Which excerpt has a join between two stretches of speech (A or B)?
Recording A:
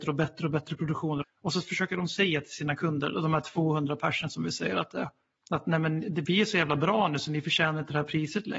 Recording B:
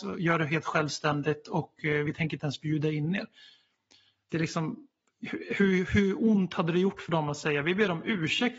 A